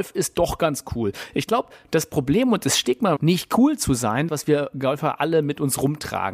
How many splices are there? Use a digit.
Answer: 2